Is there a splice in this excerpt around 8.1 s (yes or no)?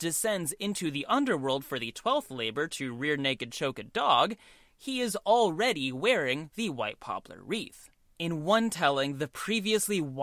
yes